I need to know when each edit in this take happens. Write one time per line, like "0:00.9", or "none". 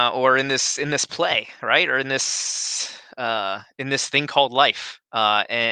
none